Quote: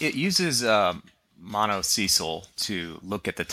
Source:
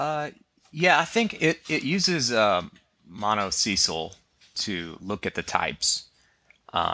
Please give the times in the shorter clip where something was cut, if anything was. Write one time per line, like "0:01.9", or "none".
0:02.5